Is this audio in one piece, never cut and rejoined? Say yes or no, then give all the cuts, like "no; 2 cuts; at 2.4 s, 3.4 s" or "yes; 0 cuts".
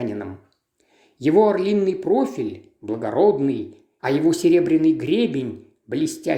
no; 1 cut; at 4.0 s